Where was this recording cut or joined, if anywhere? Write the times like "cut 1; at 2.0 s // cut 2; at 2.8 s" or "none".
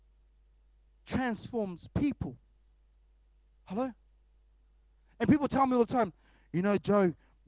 none